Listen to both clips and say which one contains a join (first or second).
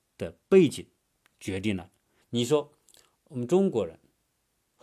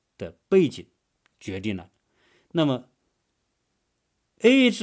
first